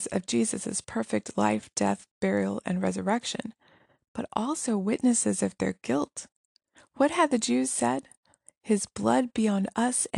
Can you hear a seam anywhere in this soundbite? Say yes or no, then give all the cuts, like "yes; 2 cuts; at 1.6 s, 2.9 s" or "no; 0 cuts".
yes; 1 cut; at 6.8 s